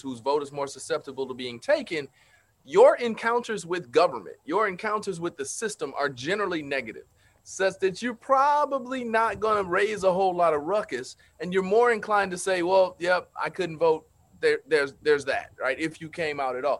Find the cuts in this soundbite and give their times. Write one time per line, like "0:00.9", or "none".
none